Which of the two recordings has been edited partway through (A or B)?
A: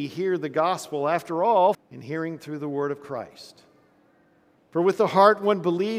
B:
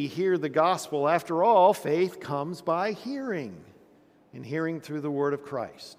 A